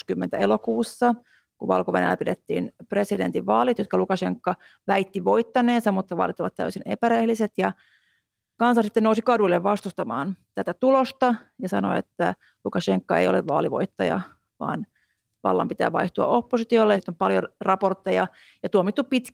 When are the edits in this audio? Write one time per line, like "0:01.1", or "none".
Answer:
0:10.4
0:16.9